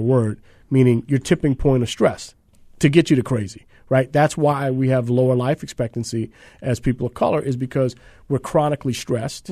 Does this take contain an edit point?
no; 0 cuts

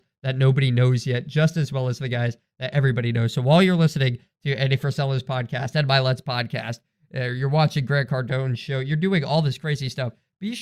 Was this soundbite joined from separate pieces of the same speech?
no; 0 cuts

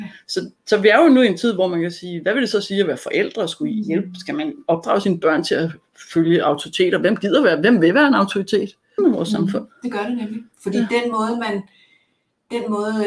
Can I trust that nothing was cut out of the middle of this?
no; 1 cut; at 9.0 s

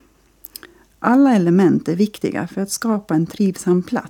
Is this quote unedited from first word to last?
yes; 0 cuts

